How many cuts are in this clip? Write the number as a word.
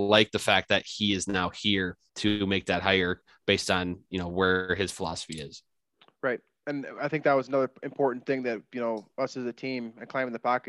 zero